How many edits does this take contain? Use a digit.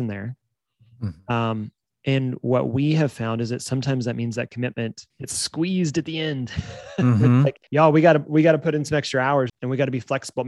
3